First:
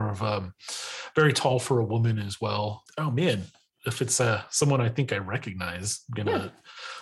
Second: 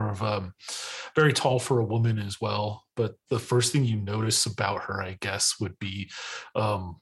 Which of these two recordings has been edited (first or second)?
first